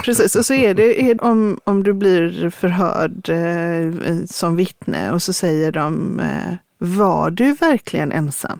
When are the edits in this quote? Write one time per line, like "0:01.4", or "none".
0:01.2